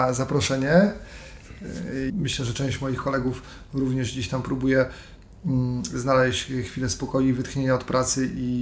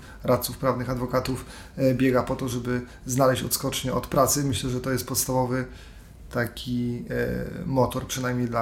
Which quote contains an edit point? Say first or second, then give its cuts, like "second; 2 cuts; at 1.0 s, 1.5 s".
first; 1 cut; at 2.1 s